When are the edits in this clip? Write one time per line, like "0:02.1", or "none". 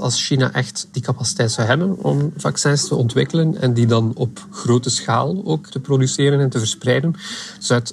none